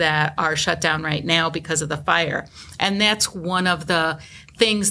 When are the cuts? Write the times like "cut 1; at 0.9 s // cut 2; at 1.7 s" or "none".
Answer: none